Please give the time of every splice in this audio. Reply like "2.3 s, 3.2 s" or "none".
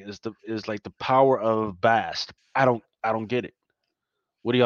2.4 s

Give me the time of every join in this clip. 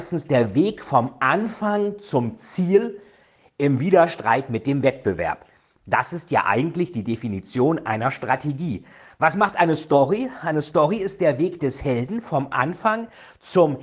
none

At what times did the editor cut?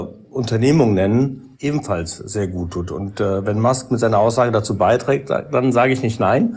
1.5 s

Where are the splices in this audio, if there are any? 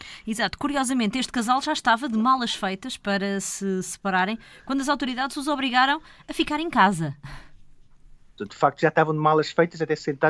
8.4 s

